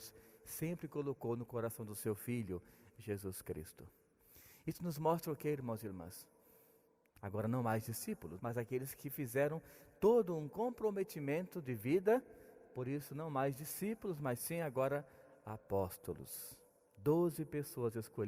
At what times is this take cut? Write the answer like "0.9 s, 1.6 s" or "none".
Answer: 7.1 s, 8.4 s